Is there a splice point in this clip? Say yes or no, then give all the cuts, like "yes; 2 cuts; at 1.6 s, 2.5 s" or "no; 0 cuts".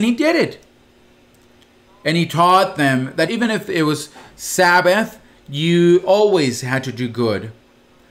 yes; 1 cut; at 3.3 s